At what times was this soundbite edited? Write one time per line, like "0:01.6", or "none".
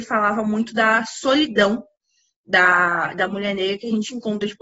none